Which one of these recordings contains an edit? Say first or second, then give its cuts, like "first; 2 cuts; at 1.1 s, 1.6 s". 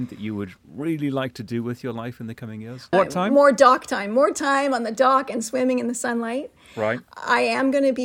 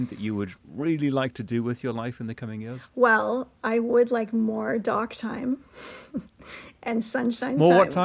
first; 1 cut; at 2.9 s